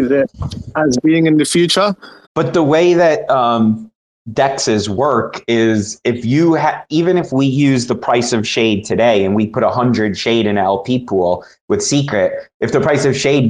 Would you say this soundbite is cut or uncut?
cut